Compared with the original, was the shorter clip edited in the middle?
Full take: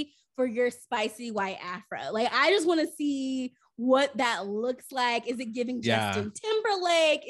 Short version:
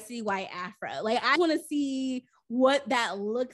yes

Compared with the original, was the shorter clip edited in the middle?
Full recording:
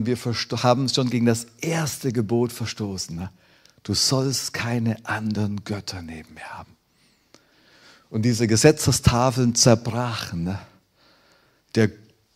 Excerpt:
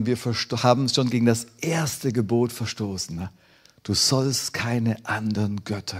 no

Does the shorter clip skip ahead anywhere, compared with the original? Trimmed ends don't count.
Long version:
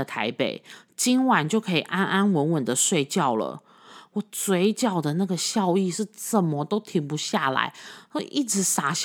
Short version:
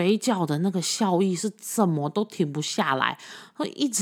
no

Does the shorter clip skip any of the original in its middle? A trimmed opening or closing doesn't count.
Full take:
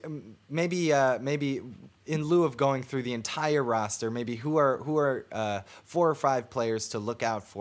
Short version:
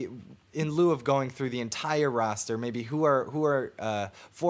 no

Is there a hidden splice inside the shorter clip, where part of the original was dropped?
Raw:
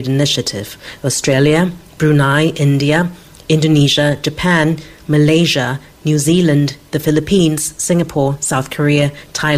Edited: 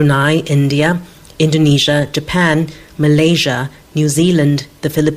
no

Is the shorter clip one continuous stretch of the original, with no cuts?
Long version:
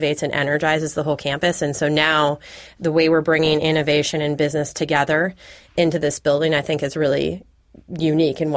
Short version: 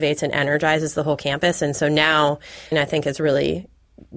no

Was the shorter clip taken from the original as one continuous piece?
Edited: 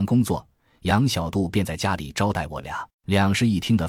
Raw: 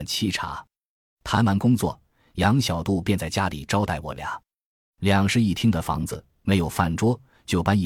no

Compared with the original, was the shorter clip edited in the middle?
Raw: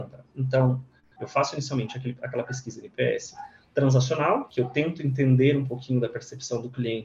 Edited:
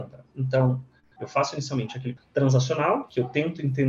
yes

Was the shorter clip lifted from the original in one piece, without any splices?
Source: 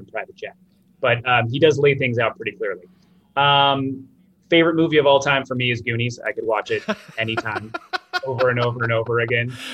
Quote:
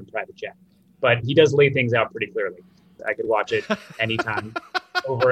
no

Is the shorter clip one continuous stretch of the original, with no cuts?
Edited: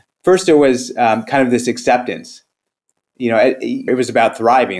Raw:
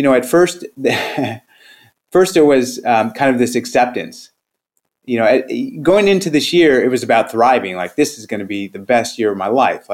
no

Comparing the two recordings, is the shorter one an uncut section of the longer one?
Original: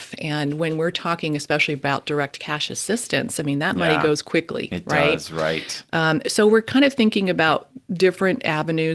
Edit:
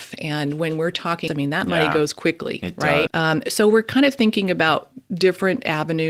no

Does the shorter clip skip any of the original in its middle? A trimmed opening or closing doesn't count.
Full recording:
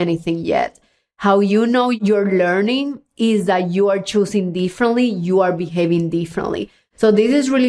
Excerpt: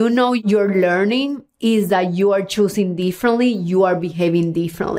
no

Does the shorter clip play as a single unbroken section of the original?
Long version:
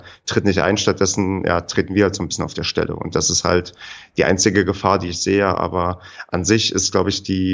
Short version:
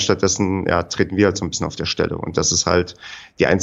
yes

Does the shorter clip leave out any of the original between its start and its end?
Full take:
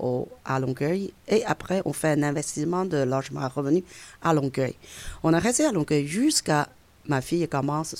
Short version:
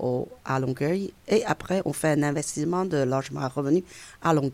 no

